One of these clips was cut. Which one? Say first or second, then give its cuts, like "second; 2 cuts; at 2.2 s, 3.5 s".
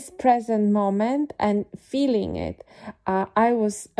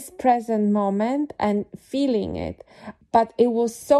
second; 1 cut; at 3.0 s